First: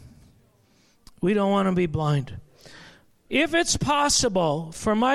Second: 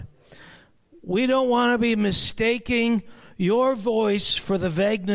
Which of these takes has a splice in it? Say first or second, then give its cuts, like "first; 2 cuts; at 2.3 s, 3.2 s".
first; 1 cut; at 3.3 s